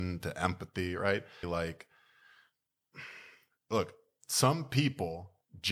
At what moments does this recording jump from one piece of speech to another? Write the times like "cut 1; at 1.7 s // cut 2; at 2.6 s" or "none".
cut 1; at 1.4 s